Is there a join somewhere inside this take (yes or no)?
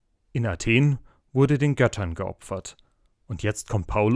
no